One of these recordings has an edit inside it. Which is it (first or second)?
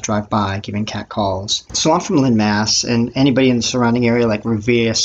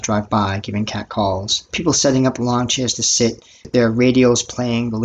first